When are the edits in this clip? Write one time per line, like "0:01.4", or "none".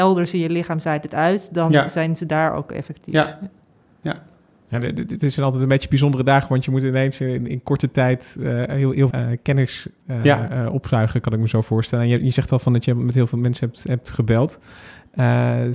0:09.1